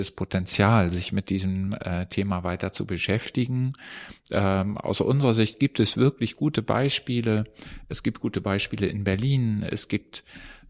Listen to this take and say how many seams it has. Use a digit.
0